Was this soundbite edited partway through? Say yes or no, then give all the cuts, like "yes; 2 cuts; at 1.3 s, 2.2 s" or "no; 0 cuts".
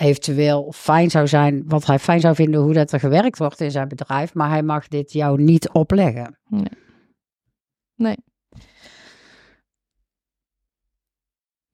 no; 0 cuts